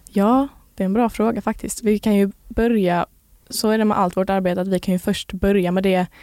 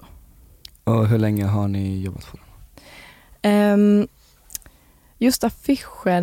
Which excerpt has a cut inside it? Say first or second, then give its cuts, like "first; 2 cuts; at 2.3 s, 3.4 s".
first; 1 cut; at 3.4 s